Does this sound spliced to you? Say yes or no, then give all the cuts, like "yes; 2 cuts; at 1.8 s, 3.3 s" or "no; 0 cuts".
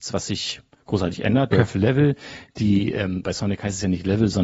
yes; 1 cut; at 1.5 s